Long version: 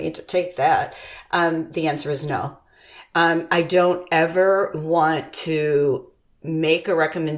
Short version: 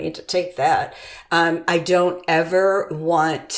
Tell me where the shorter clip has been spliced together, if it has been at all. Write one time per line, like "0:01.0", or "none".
0:01.3